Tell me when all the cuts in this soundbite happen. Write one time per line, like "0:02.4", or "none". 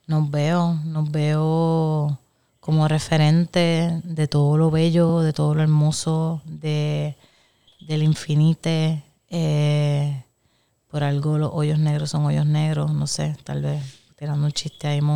none

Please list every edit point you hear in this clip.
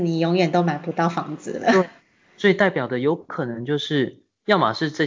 none

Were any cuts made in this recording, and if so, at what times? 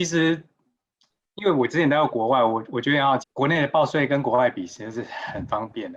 0:03.2

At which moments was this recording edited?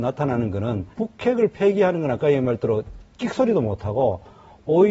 0:00.9

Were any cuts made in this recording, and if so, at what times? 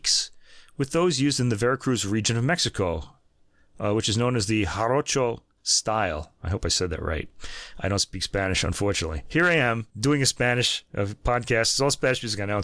0:09.9

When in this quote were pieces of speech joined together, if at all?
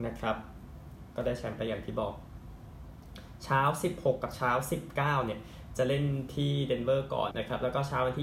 0:07.3

